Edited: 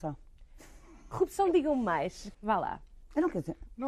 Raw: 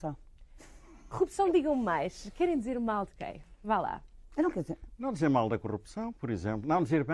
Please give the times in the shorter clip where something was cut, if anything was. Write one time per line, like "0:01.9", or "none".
0:02.3